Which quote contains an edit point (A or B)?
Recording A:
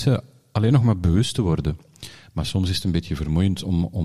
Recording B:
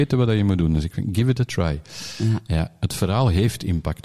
A